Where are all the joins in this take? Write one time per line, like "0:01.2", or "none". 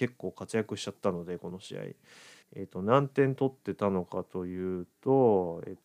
none